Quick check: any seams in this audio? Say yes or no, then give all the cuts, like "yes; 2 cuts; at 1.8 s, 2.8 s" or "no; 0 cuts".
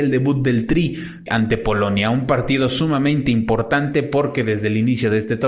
yes; 1 cut; at 1.3 s